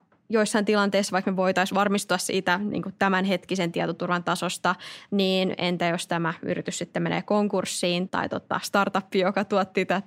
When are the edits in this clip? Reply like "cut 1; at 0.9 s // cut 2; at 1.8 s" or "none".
cut 1; at 8.1 s